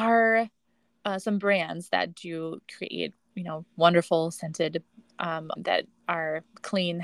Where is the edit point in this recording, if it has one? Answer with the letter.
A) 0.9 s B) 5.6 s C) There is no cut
B